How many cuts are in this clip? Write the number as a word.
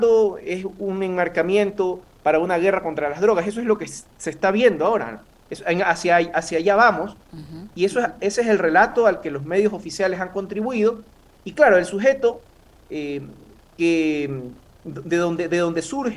zero